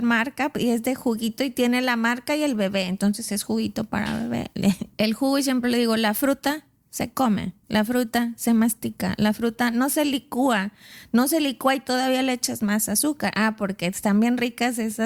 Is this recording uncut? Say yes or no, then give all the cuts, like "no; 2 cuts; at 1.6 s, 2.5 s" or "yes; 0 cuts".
no; 1 cut; at 4.9 s